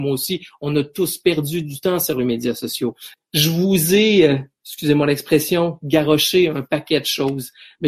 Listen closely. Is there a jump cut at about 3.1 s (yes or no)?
yes